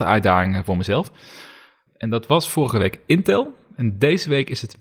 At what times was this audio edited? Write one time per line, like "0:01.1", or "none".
0:01.9